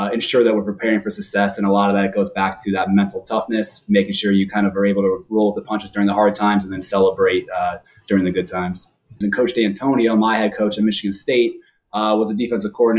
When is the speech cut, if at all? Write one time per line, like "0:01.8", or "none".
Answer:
0:09.2